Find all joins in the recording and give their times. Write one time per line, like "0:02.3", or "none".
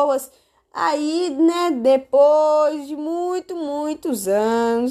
none

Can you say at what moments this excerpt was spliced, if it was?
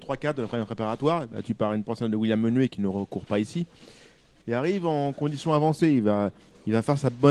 0:04.4

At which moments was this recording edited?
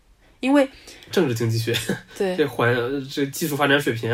0:01.1

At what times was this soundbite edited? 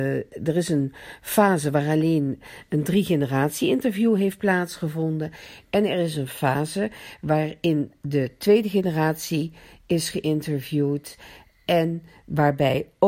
none

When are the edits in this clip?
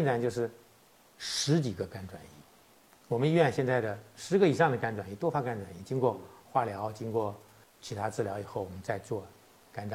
none

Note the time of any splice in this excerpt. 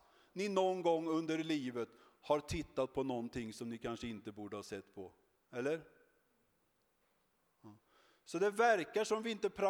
none

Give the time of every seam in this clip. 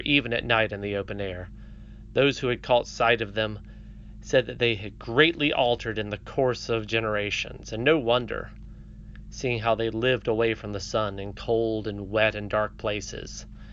none

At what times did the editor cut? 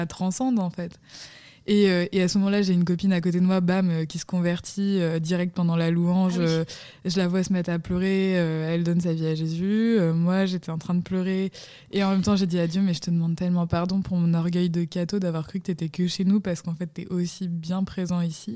none

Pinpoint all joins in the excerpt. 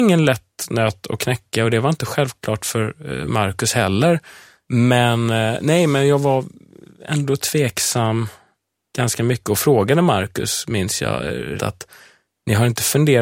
0:04.7
0:11.6

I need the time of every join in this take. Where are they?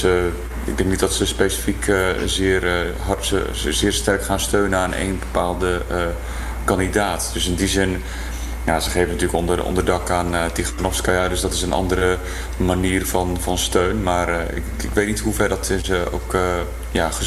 none

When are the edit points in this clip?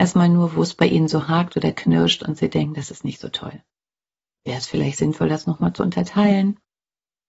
0:04.4

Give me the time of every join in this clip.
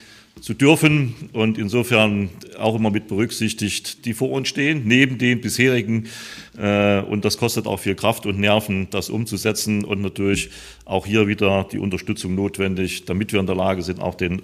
0:04.0

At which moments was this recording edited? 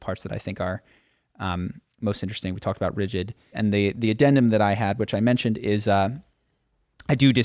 0:03.5

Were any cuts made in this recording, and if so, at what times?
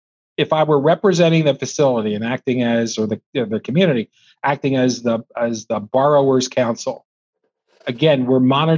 none

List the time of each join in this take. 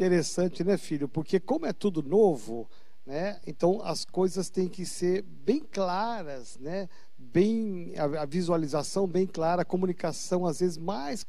none

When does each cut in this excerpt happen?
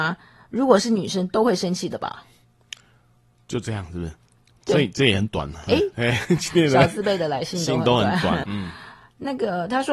0:05.9
0:08.4

